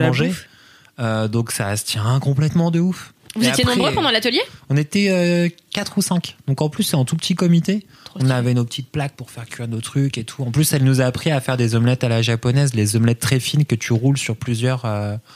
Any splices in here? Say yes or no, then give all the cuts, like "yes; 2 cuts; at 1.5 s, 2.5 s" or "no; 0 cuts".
no; 0 cuts